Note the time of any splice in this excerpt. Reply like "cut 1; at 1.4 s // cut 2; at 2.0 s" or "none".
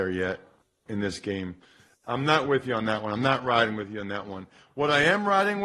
none